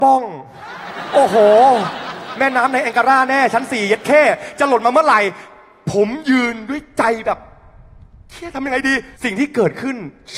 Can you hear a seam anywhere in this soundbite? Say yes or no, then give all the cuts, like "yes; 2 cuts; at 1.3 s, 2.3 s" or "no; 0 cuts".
yes; 1 cut; at 9.2 s